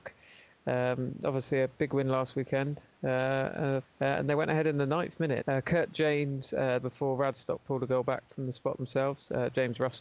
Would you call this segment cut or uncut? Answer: cut